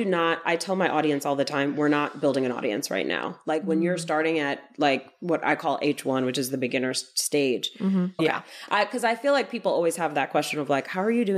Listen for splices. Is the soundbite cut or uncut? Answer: cut